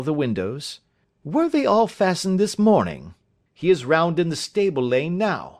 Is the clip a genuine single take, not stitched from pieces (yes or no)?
no